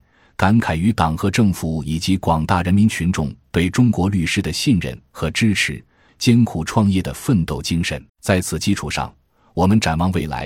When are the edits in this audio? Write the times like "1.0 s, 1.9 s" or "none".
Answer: 6.1 s, 8.1 s